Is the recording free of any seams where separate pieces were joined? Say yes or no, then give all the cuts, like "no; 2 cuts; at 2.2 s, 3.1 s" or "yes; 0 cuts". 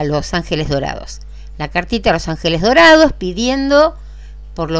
yes; 0 cuts